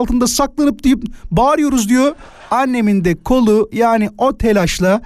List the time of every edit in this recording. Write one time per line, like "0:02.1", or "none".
0:02.5